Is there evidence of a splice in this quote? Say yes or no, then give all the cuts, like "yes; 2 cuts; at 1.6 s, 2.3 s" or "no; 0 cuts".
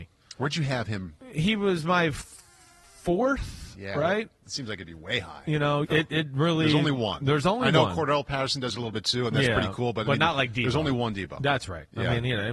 yes; 1 cut; at 5.8 s